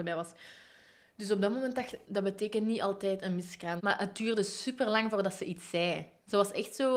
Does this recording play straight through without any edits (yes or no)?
no